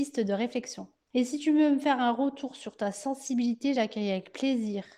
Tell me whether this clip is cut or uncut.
uncut